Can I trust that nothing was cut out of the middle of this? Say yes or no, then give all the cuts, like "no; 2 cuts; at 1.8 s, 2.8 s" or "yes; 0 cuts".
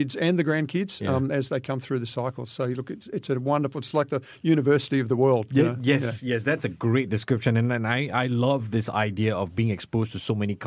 yes; 0 cuts